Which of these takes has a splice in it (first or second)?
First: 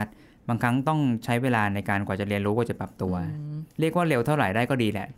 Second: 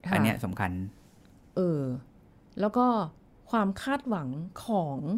first